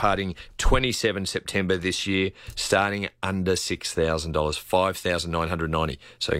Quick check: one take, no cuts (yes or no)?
yes